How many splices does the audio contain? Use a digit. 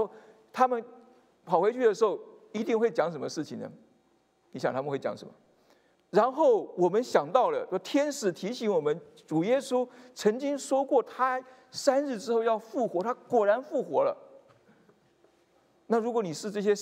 1